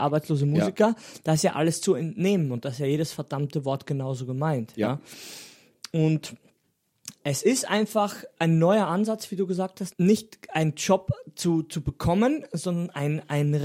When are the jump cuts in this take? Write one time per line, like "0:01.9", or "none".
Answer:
0:09.9